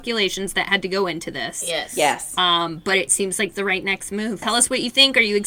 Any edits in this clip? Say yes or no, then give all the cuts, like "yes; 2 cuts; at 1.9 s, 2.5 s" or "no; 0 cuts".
yes; 1 cut; at 4.4 s